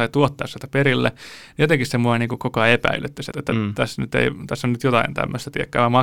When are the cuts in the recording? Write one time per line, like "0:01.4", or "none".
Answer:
0:03.3